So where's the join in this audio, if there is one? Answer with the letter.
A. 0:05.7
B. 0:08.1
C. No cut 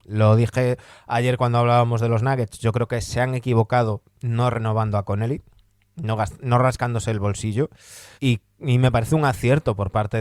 B